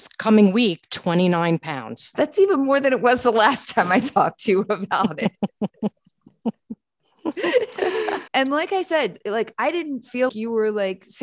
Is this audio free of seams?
no; 3 cuts; at 2.1 s, 8.3 s, 10.3 s

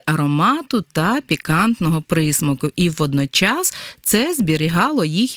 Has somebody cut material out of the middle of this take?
no; 0 cuts

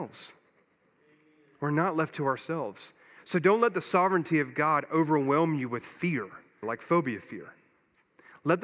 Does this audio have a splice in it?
yes; 1 cut; at 6.6 s

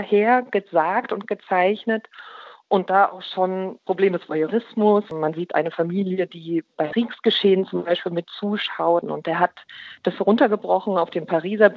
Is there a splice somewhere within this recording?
yes; 1 cut; at 9.0 s

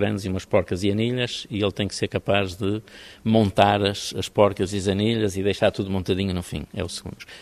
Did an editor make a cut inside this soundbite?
no; 0 cuts

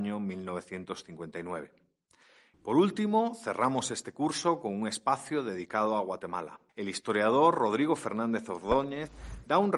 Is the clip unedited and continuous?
no; 2 cuts; at 2.5 s, 6.7 s

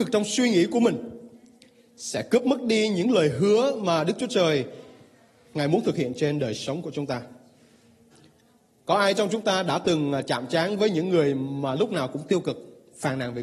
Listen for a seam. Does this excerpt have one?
no; 0 cuts

